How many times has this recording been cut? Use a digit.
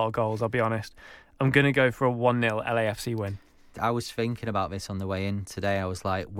1